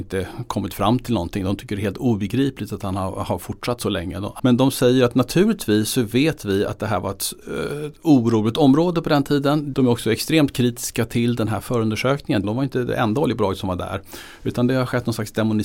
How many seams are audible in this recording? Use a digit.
3